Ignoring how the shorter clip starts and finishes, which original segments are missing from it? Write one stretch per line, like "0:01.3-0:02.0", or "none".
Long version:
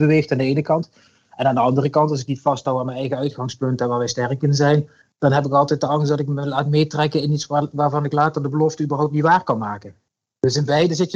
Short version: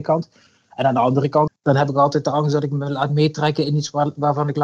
0:02.1-0:05.0